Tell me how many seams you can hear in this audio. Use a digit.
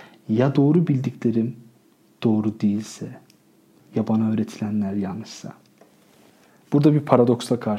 1